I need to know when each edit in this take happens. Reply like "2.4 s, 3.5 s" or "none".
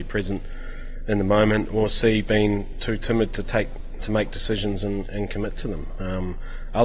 4.0 s